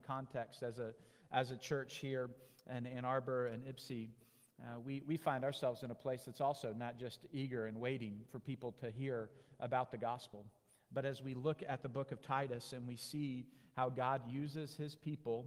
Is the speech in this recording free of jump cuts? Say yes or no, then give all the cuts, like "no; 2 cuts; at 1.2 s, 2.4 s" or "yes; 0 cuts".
yes; 0 cuts